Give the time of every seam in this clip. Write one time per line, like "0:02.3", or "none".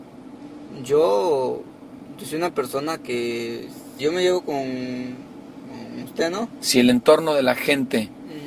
0:04.0
0:06.6